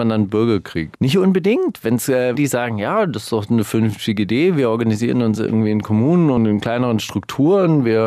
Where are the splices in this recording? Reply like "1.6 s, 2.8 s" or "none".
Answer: 0.9 s, 2.3 s